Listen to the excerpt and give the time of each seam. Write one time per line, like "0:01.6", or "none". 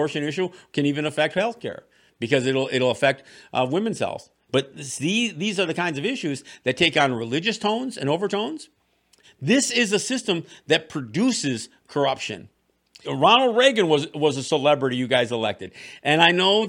0:04.5
0:09.2
0:13.0